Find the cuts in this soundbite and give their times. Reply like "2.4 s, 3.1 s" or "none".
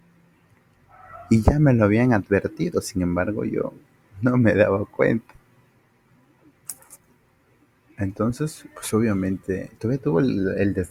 none